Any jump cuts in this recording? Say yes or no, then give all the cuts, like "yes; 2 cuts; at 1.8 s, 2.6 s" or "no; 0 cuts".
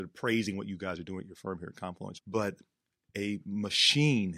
yes; 1 cut; at 2.2 s